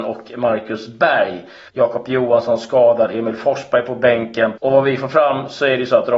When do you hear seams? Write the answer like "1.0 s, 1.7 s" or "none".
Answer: 1.7 s, 4.6 s